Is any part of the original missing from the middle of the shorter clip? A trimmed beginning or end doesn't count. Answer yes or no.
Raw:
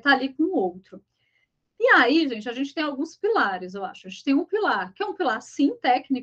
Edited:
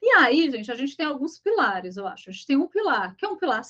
no